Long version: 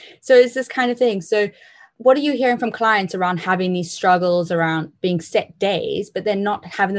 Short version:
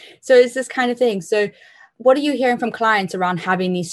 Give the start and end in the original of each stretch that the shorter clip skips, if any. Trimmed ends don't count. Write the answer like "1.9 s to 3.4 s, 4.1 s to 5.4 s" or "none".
none